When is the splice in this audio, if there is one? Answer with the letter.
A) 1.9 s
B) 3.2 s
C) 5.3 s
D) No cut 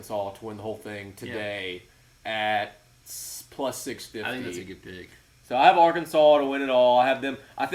D